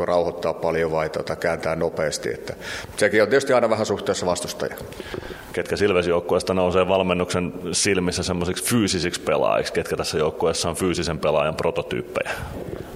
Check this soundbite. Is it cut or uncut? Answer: uncut